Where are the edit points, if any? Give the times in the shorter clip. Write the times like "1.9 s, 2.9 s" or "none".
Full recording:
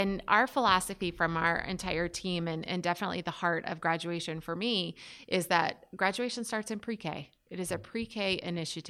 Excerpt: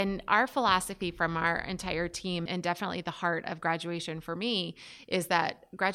2.5 s